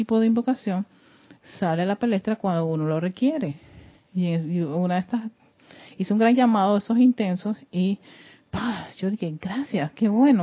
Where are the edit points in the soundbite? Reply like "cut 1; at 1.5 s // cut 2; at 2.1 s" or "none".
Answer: none